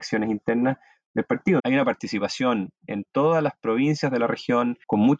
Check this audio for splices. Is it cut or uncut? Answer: cut